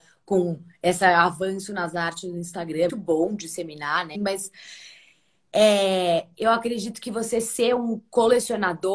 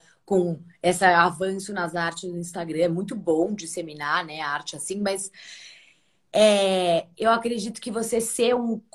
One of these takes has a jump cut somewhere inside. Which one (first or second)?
first